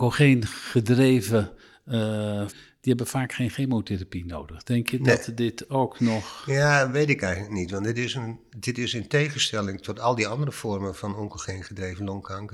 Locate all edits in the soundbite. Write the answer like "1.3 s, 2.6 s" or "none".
2.5 s